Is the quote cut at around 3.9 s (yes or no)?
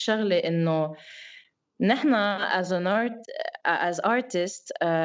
no